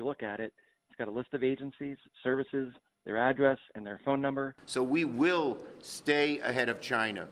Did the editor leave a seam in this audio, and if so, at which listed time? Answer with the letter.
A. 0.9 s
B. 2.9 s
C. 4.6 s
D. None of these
C